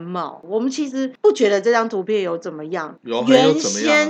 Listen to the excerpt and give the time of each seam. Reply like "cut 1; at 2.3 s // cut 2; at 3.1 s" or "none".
none